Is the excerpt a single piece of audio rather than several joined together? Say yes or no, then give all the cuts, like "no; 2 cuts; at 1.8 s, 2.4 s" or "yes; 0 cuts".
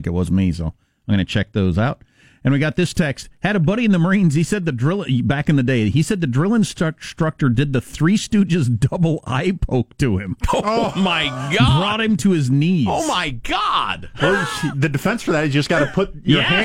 yes; 0 cuts